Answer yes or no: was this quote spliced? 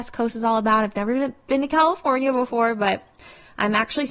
no